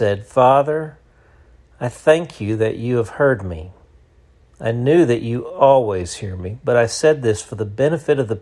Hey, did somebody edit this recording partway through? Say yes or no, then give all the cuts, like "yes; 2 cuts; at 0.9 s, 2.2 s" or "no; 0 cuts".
no; 0 cuts